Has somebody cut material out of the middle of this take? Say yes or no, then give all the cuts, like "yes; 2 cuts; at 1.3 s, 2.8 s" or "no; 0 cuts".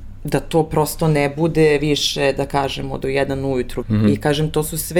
yes; 1 cut; at 3.8 s